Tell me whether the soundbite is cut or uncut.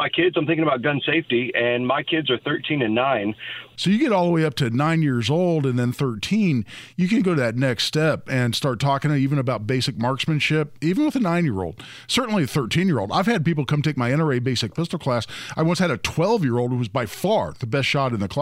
cut